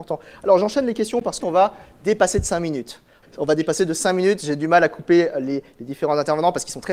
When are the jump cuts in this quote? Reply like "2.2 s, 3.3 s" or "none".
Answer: 1.4 s, 3.2 s